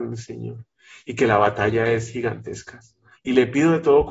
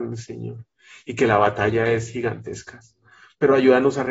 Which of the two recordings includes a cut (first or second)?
first